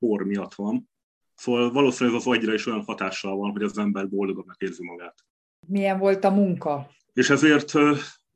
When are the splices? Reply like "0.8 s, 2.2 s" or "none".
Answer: 1.2 s, 7.0 s